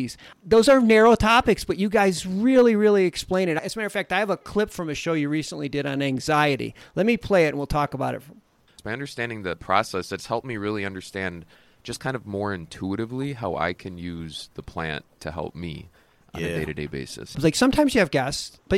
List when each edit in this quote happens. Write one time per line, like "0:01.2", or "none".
0:17.3